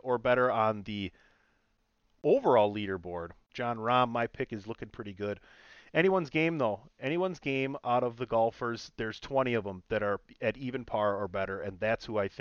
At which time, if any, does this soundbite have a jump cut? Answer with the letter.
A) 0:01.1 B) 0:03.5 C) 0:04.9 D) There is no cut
B